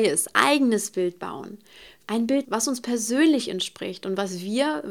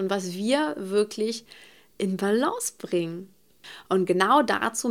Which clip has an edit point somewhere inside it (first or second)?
first